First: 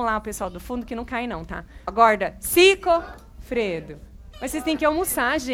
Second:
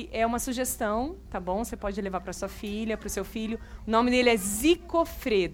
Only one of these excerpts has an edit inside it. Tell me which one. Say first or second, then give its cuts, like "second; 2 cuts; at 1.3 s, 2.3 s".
first; 2 cuts; at 1.9 s, 4.3 s